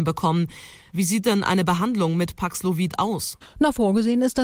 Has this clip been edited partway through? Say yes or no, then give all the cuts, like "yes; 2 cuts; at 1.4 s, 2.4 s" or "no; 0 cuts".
yes; 1 cut; at 0.9 s